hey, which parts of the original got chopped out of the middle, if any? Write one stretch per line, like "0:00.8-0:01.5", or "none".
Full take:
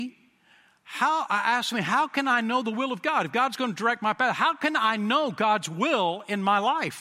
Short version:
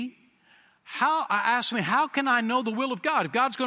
none